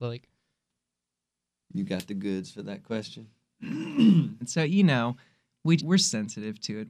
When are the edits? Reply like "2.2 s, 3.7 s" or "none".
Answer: 4.4 s, 5.8 s